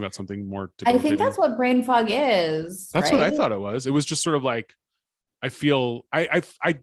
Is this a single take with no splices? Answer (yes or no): yes